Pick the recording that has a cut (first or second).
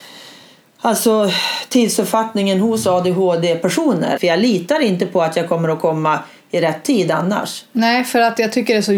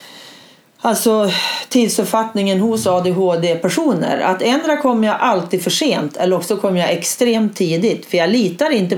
first